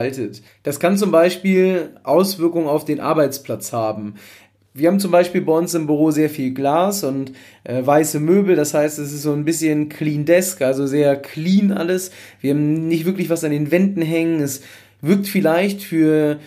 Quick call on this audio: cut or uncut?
uncut